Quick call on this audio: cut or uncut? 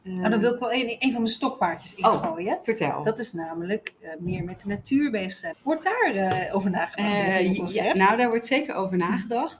cut